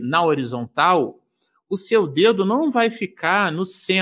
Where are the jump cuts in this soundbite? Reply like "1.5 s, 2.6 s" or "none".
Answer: none